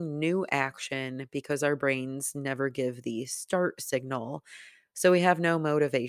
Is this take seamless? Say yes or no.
yes